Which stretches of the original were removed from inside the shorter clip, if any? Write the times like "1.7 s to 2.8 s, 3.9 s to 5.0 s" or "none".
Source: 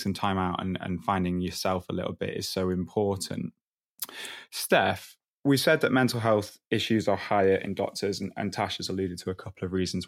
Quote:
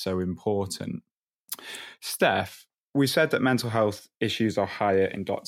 none